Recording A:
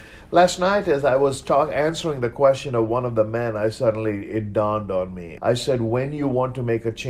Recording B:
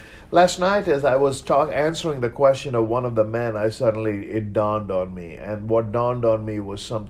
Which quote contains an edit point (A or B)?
A